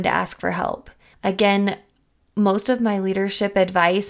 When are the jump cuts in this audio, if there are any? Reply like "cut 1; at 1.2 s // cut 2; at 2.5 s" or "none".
cut 1; at 1.1 s